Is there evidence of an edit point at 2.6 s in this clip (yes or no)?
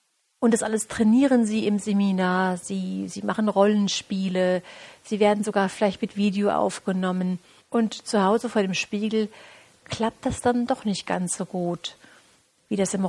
no